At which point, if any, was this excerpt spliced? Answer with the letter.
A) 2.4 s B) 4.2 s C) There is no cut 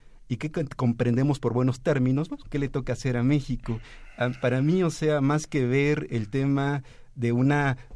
A